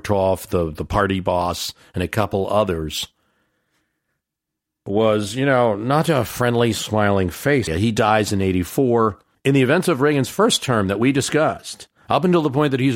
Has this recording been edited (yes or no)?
yes